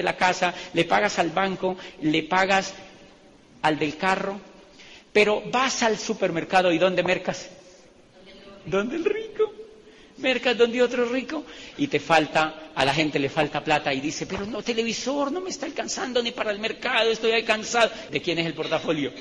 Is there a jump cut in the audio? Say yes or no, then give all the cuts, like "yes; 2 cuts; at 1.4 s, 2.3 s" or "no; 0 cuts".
yes; 1 cut; at 18.1 s